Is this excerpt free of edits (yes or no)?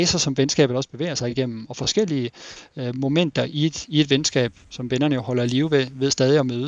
yes